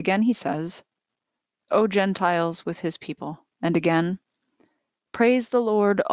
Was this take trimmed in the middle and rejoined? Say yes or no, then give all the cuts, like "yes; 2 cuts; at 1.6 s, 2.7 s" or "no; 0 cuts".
yes; 2 cuts; at 1.7 s, 3.5 s